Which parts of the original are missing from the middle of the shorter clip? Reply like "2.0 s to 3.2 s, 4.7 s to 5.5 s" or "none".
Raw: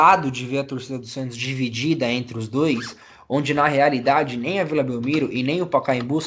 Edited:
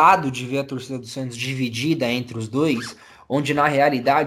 none